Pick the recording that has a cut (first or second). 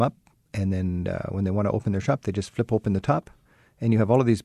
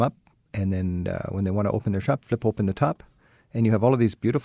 second